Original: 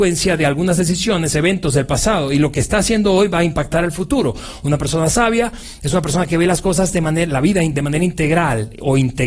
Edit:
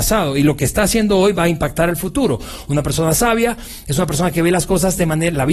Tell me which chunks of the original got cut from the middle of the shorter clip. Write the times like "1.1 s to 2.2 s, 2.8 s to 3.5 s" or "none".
none